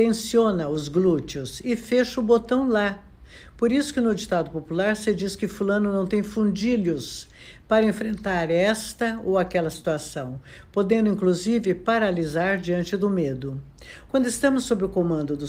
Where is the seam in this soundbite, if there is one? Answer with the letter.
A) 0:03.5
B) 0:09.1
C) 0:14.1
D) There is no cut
C